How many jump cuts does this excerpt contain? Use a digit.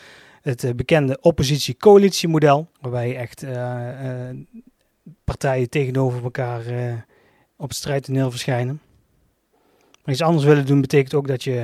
1